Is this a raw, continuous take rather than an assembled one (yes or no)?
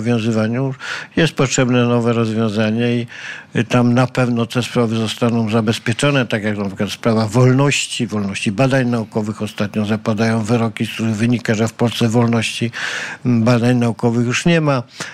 yes